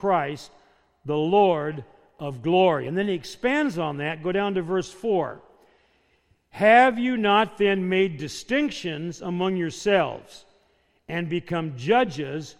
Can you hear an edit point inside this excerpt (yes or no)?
no